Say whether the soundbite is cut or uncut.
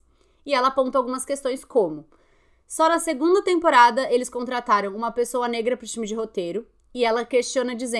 uncut